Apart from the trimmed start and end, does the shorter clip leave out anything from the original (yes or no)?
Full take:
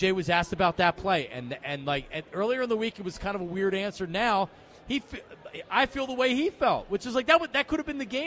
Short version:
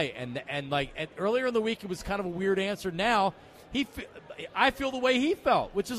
no